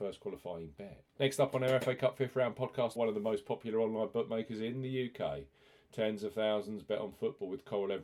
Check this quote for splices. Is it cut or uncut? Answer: cut